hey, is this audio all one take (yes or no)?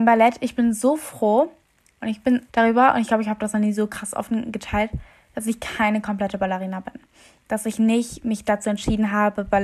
no